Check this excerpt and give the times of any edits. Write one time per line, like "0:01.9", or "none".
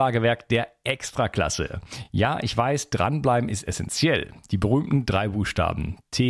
none

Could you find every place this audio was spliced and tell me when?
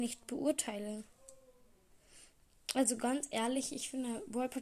none

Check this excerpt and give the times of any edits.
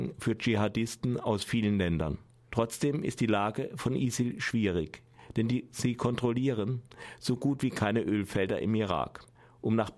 0:02.4

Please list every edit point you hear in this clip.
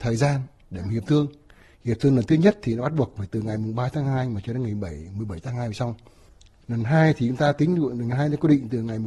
none

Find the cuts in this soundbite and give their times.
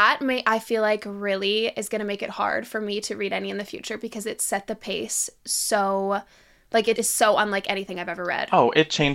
0:07.0

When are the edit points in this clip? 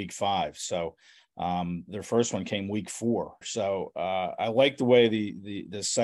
0:03.4

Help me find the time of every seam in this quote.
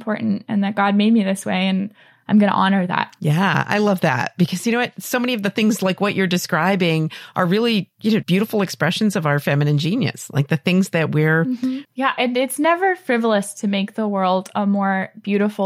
0:08.2
0:11.9

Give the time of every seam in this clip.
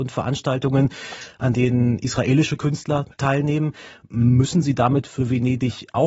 none

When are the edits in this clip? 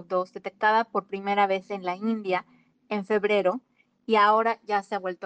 none

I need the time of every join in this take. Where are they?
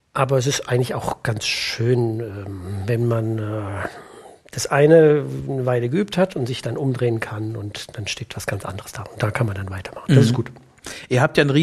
none

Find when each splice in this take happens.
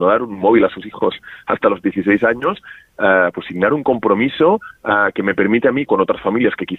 0:05.9

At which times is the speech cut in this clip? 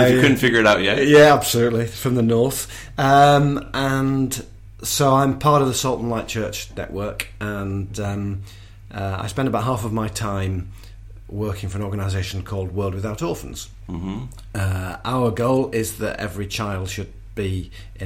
none

